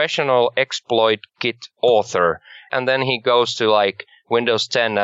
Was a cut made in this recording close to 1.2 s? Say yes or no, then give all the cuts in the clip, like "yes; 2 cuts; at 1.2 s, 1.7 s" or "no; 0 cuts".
no; 1 cut; at 2.7 s